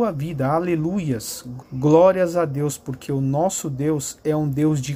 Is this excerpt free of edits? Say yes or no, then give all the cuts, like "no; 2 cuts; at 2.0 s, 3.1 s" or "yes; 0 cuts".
no; 1 cut; at 1.6 s